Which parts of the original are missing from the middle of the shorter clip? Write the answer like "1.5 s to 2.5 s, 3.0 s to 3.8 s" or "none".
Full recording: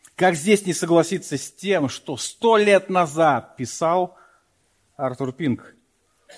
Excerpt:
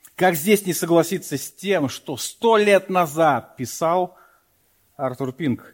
none

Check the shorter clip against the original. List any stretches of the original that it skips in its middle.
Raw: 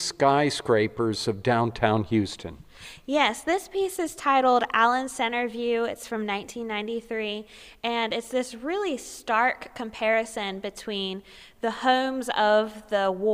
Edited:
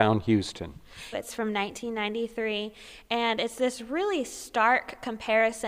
3.0 s to 5.9 s

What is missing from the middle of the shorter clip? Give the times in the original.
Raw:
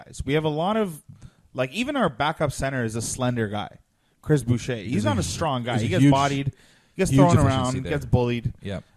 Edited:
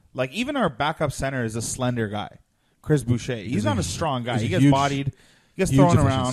none

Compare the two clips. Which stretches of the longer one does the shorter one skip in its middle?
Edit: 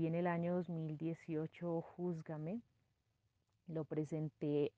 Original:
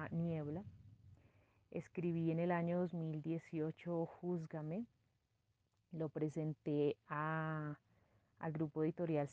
none

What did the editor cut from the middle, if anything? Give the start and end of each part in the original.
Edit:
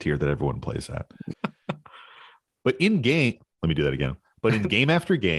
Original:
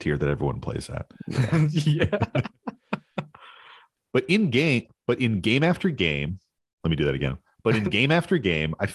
1.3 s to 2.8 s, 5.0 s to 6.7 s

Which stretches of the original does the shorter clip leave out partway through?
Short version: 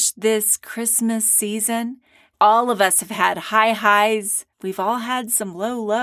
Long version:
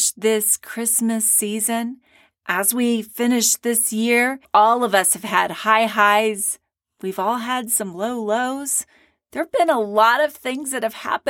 2.3 s to 4.5 s, 6.7 s to 6.9 s

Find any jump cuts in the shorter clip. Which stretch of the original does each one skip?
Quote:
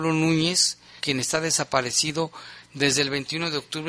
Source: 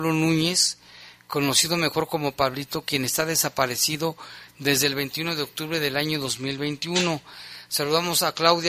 1.0 s to 2.8 s

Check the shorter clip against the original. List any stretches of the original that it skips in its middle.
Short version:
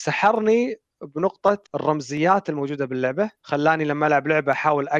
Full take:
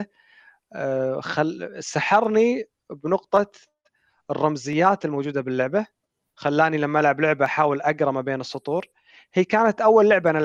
3.5 s to 4.2 s, 5.9 s to 6.3 s

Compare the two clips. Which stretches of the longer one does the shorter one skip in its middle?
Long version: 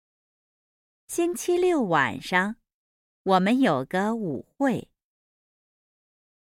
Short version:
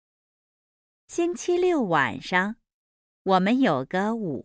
none

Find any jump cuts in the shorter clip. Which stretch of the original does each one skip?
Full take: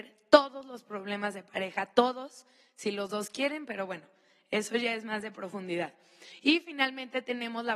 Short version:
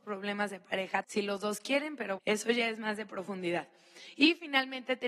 1.9 s to 2.7 s, 3.9 s to 4.4 s

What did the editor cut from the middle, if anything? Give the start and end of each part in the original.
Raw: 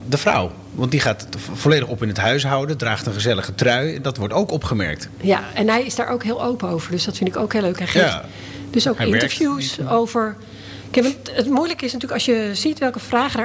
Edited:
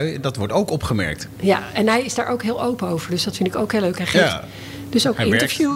none

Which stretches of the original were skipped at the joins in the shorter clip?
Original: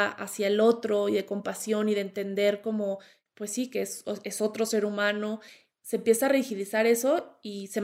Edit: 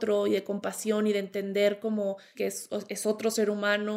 3.2 s to 3.7 s

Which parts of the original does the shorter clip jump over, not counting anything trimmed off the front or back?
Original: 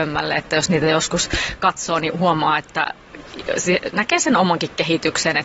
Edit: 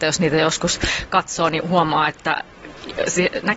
none

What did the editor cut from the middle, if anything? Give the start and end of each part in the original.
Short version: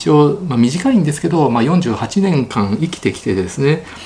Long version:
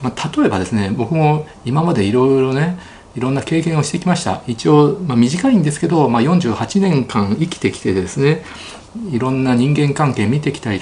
none

